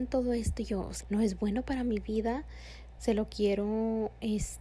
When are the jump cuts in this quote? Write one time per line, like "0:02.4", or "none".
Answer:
0:01.0
0:03.0